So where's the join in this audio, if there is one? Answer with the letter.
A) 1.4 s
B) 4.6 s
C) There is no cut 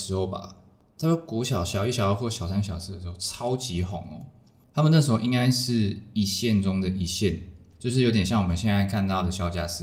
C